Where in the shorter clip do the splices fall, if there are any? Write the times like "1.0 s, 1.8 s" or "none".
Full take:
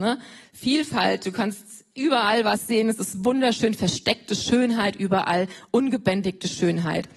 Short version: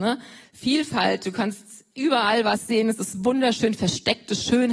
none